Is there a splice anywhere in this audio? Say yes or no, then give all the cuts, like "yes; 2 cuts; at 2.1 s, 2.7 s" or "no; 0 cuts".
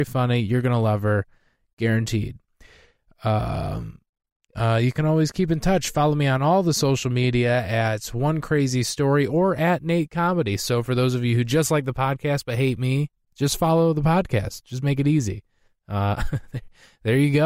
yes; 1 cut; at 4.5 s